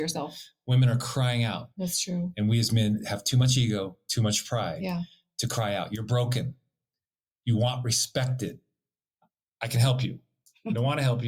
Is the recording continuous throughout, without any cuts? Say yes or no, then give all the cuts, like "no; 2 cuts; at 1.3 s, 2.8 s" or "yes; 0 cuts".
no; 1 cut; at 1.7 s